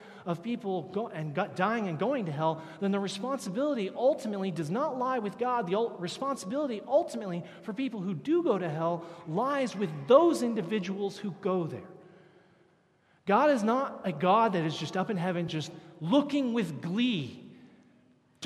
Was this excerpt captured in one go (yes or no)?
yes